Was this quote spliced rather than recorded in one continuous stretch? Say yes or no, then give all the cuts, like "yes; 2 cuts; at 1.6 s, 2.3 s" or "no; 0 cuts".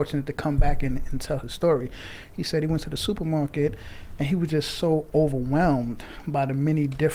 no; 0 cuts